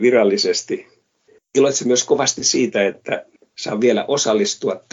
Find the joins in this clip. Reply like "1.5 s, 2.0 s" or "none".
none